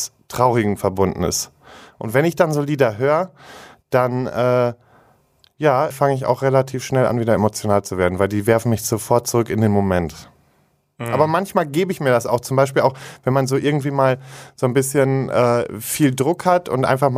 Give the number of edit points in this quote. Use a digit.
1